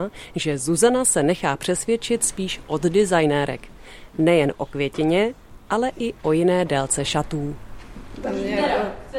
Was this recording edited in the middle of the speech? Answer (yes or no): yes